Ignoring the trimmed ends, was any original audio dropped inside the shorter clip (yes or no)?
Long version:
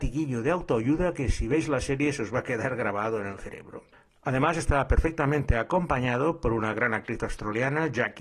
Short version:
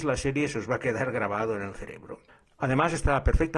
no